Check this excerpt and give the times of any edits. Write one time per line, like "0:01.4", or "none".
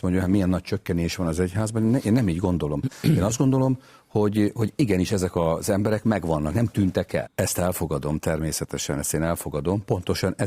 0:07.3